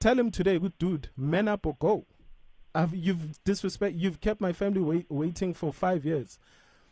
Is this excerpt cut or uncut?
uncut